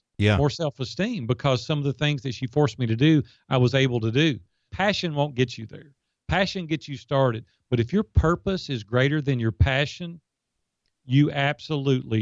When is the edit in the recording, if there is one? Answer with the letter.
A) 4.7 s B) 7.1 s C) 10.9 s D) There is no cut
A